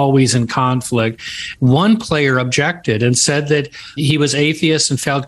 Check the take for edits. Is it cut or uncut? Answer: cut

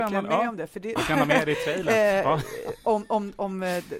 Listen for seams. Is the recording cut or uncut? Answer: cut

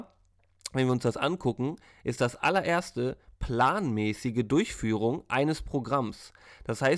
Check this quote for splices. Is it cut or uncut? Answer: uncut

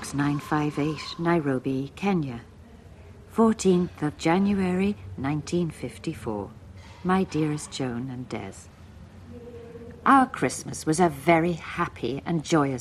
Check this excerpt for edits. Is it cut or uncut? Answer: uncut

